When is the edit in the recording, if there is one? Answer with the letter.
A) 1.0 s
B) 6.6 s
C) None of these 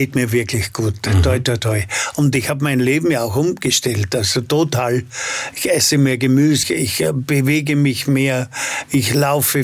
B